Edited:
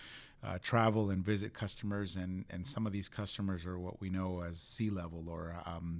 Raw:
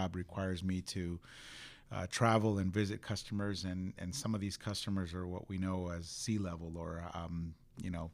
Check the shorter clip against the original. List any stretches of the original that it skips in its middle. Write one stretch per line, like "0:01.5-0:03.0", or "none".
none